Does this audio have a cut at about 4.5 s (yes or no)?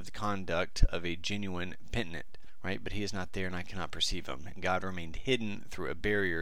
yes